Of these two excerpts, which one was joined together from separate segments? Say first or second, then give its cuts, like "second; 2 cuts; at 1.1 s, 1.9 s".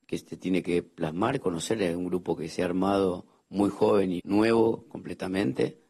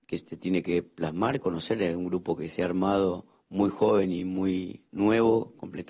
first; 1 cut; at 4.2 s